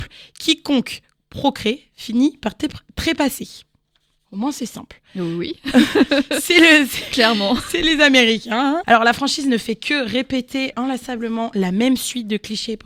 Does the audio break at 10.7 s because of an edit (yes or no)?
yes